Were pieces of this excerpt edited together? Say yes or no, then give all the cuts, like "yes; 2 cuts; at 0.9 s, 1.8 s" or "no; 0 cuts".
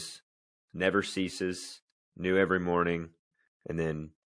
yes; 1 cut; at 2.0 s